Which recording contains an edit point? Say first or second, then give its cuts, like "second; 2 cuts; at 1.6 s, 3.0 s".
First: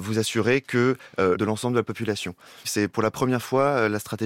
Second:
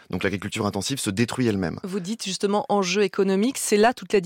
first; 2 cuts; at 1.3 s, 2.6 s